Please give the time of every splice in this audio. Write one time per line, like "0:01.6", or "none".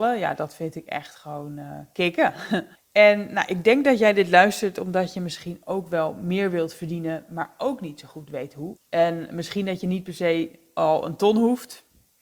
0:02.7
0:08.8